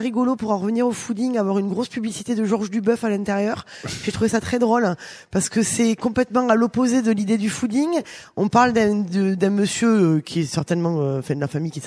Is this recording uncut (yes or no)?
yes